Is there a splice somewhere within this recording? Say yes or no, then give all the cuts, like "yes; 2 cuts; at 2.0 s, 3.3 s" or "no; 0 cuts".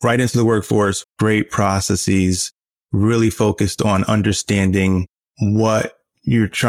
yes; 1 cut; at 1.0 s